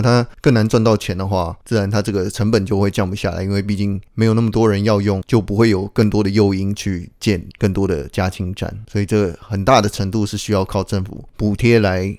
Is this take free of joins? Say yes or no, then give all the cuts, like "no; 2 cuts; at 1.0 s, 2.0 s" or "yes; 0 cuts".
no; 1 cut; at 5.2 s